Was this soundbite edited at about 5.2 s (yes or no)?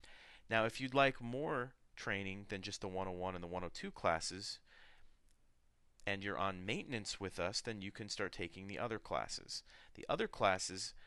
no